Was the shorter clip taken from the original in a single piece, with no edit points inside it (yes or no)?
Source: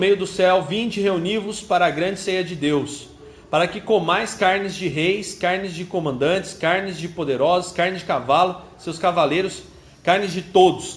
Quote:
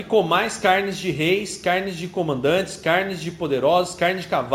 yes